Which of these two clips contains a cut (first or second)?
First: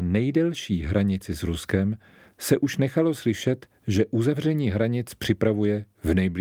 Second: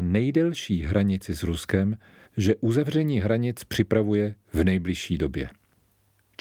second